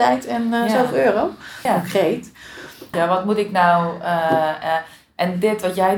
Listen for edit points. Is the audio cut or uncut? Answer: cut